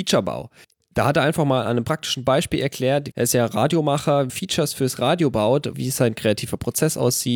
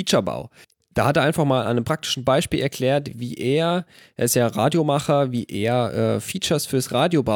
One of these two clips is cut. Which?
first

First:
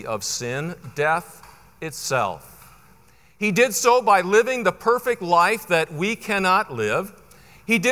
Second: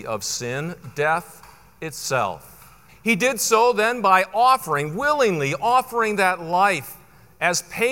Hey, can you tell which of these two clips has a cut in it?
second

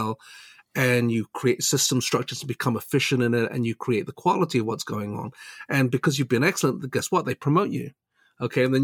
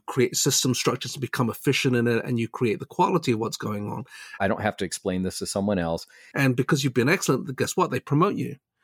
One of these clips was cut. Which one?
second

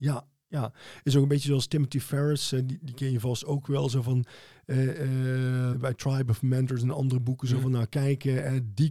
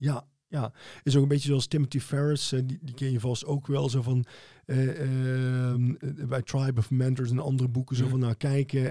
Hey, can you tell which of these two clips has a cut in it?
first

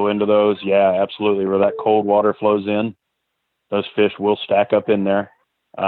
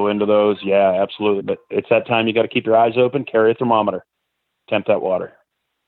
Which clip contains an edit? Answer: second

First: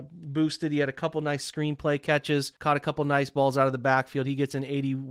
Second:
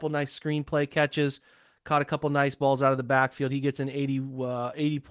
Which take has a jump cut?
first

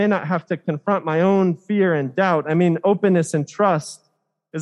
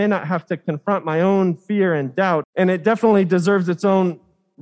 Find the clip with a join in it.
second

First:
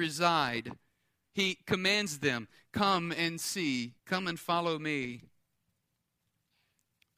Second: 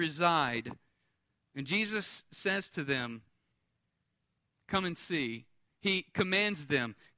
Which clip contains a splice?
first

